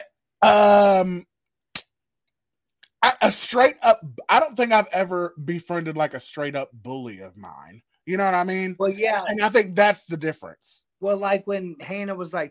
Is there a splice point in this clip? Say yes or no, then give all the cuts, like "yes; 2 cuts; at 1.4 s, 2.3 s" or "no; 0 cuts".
no; 0 cuts